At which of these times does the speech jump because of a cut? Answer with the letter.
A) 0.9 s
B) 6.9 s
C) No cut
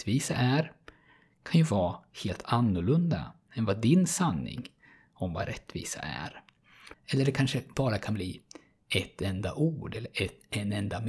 B